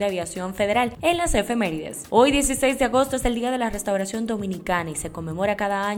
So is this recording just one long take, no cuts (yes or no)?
no